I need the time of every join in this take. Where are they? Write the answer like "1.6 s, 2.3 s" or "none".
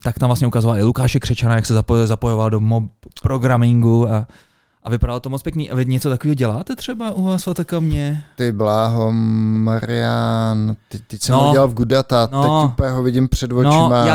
none